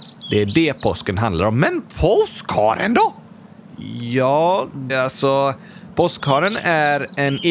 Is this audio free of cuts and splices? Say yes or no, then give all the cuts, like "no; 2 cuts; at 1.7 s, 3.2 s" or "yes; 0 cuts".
no; 1 cut; at 4.9 s